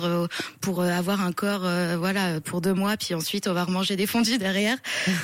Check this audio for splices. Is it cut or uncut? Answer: uncut